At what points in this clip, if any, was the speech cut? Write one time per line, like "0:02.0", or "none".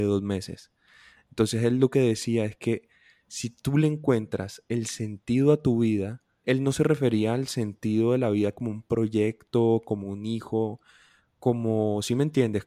0:06.4

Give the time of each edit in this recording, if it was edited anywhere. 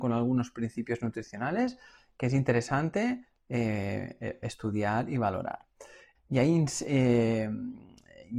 0:06.2

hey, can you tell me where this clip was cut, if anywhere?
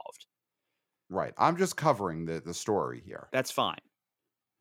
0:03.3

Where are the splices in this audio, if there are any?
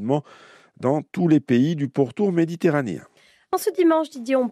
none

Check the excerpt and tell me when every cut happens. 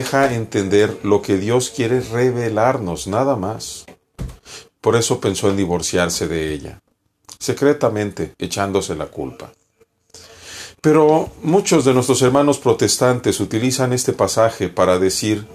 0:04.7

